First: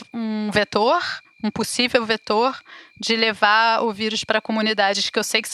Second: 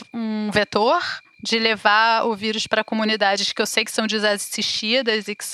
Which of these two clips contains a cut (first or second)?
second